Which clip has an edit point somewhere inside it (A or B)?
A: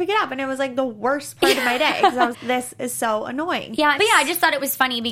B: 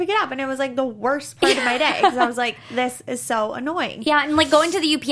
A